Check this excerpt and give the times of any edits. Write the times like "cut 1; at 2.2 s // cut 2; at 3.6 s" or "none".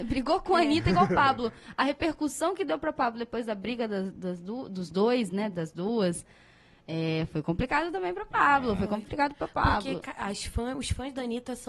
none